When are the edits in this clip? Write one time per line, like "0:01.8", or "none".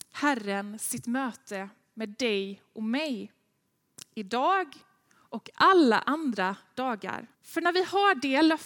0:07.3